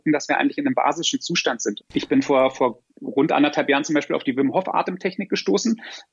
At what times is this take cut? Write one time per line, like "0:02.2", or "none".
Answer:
0:01.8
0:02.9

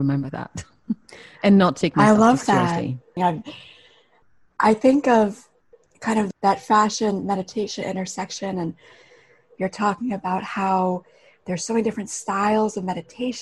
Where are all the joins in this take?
0:03.2

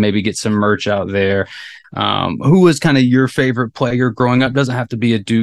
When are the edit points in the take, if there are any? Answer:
0:01.8

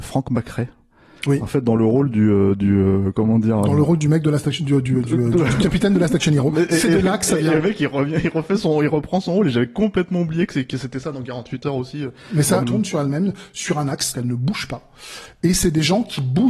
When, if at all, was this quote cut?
0:12.6
0:14.1

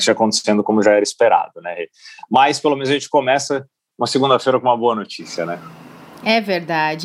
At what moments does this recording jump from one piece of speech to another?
none

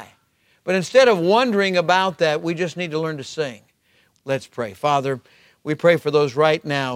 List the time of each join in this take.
0:04.1

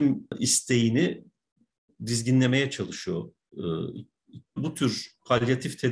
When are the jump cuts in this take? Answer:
0:04.6

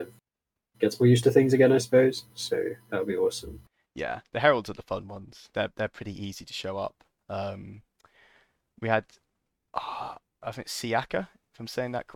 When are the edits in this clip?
none

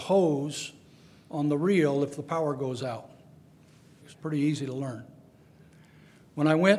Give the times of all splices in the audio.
0:04.0

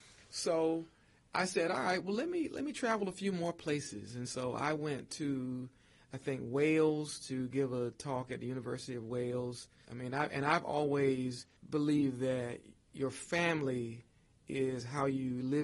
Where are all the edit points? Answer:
0:09.9
0:11.6

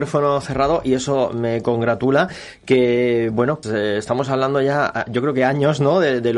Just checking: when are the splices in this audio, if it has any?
0:03.6

